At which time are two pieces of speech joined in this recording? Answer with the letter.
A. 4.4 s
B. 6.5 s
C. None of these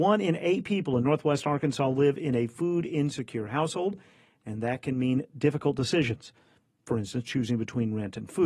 C